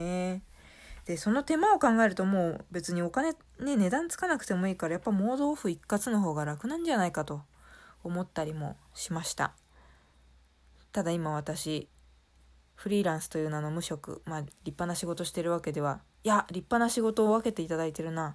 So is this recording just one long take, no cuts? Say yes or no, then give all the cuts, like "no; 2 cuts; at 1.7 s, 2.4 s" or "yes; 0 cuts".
no; 1 cut; at 14.5 s